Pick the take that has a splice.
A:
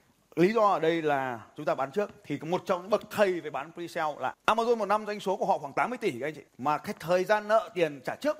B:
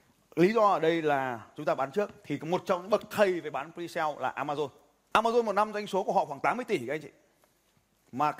A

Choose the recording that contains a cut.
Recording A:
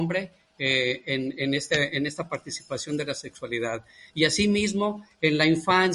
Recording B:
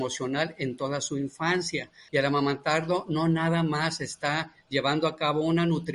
B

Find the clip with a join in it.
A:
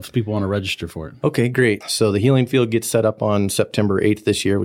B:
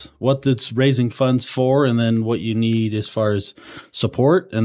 A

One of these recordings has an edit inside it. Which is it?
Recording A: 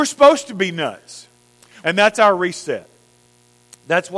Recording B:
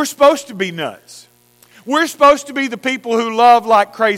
A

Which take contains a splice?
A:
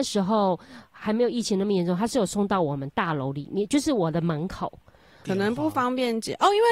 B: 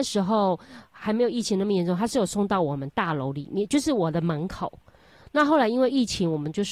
A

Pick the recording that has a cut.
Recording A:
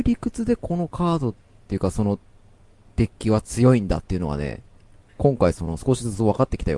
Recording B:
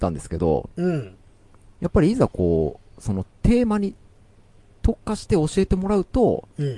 A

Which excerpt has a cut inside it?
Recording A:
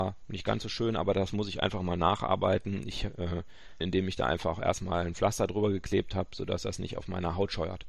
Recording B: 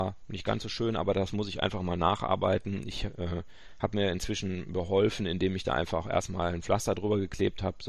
A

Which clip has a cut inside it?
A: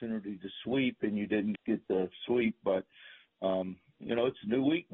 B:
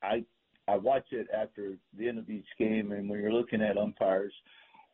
A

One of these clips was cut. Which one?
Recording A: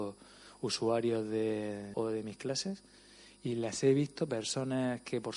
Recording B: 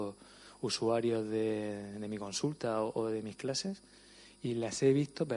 A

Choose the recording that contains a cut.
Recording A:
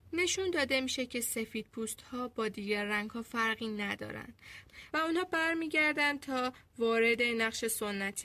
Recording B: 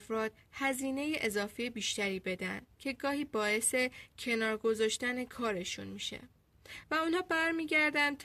A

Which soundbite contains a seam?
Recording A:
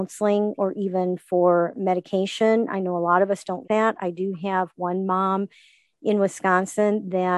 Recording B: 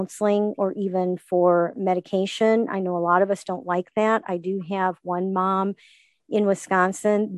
A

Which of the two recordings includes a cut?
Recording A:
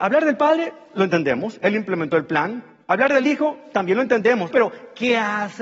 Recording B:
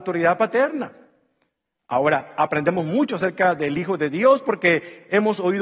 A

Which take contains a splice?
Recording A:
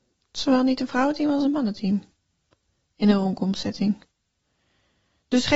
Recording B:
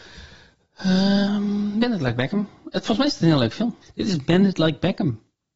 B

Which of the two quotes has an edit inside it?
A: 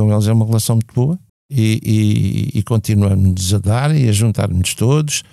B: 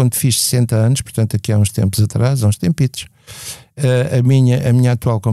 A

